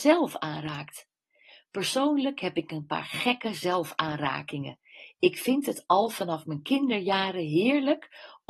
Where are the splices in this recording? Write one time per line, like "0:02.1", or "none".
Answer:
none

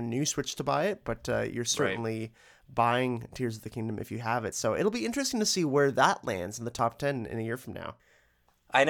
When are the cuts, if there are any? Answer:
none

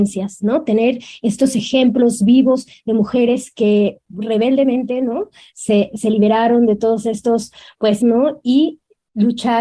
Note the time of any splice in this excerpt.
0:08.0

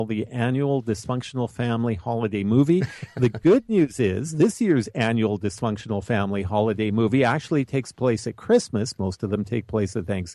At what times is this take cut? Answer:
none

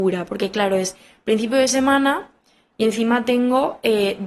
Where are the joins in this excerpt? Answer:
none

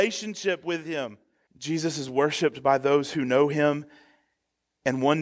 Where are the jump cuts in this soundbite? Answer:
0:01.5

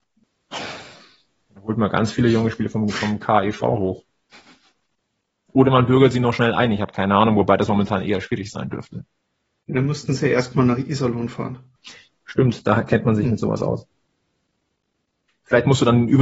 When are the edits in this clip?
none

